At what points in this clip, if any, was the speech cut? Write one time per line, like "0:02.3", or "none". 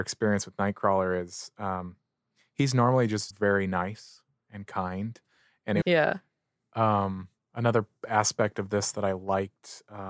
0:03.3
0:05.8